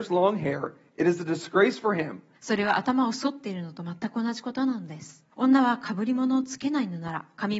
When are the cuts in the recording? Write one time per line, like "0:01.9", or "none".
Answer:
0:02.3
0:05.3